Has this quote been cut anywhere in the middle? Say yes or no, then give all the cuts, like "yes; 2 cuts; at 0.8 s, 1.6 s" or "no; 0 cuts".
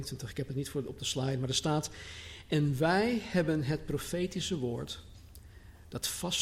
no; 0 cuts